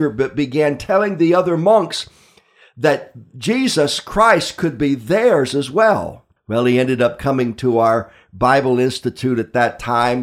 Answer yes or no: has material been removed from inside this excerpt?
yes